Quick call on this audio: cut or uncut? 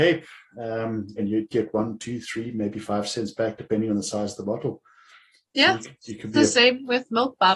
cut